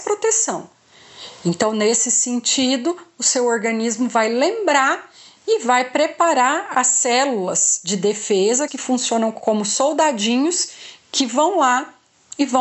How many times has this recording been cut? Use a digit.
1